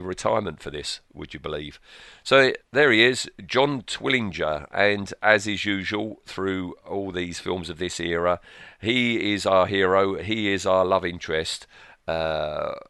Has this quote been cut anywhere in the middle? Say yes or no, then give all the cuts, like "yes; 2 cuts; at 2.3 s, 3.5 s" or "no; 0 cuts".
no; 0 cuts